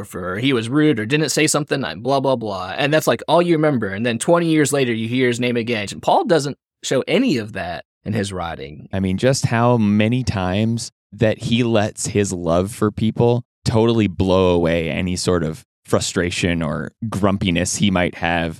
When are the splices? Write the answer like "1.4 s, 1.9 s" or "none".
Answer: 5.9 s, 8.9 s

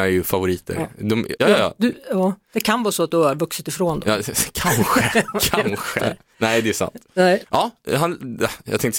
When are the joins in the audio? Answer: 1.4 s, 6.0 s, 7.4 s

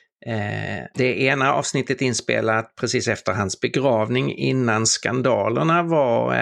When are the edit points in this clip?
0.9 s

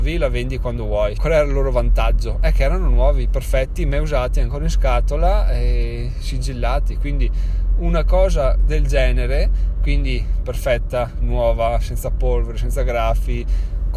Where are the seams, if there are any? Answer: 1.2 s

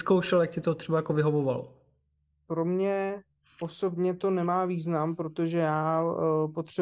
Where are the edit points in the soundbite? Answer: 2.5 s

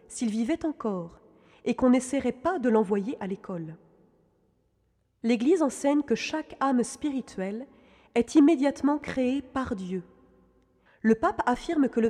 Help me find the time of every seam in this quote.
10.9 s

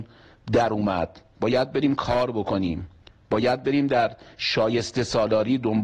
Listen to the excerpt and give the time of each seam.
none

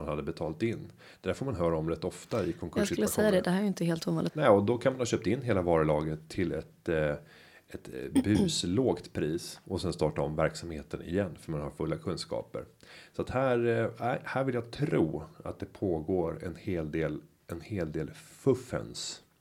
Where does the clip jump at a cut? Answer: 4.3 s

